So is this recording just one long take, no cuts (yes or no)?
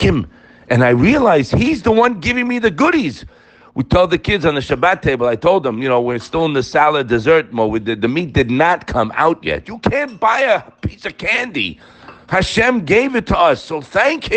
no